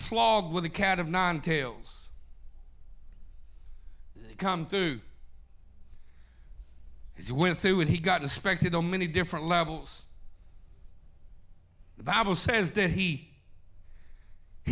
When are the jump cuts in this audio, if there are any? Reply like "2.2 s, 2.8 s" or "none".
4.1 s